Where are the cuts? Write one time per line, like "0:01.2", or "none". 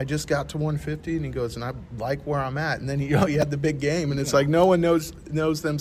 none